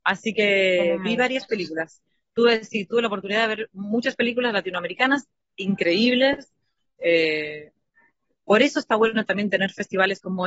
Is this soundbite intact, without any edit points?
yes; 0 cuts

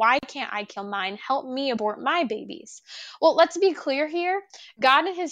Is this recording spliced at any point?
no; 0 cuts

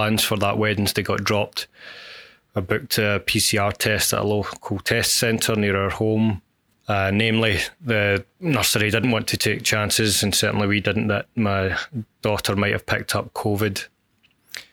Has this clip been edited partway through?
yes; 1 cut; at 6.7 s

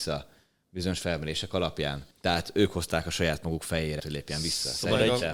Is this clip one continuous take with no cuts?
no; 2 cuts; at 2.1 s, 4.0 s

